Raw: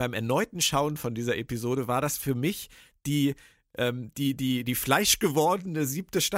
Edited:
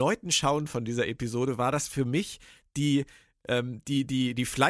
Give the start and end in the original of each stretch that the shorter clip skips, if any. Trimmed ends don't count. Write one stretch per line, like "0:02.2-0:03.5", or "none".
none